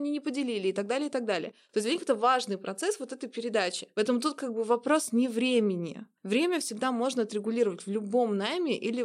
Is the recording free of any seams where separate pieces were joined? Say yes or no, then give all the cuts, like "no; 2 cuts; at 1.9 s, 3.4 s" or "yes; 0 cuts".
yes; 0 cuts